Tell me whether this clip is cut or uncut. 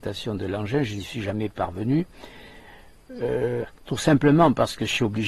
cut